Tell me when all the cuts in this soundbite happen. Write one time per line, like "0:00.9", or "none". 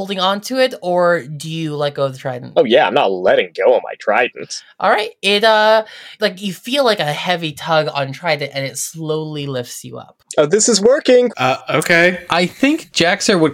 0:11.3